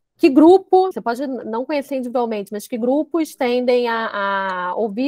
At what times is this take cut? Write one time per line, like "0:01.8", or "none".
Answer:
0:00.9